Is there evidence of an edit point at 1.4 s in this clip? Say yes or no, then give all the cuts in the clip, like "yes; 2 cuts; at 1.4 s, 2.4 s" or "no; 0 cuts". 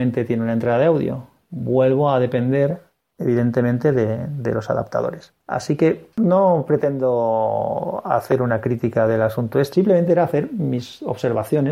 no; 1 cut; at 9.7 s